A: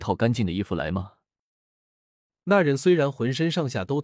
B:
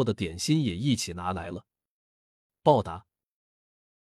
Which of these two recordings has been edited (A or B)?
B